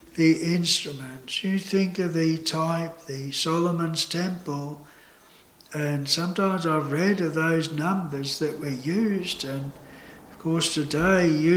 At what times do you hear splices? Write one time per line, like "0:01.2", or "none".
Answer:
none